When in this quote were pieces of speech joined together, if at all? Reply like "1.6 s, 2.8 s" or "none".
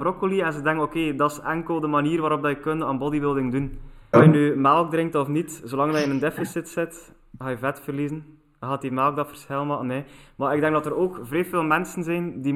4.1 s